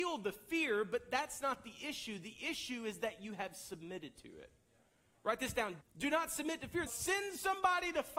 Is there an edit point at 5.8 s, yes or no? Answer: yes